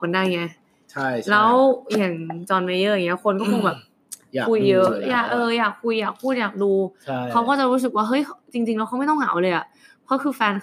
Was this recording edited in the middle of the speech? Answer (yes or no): no